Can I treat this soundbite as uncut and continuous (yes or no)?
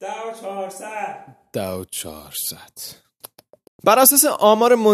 no